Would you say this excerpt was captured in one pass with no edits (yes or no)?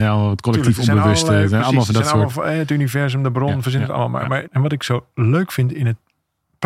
no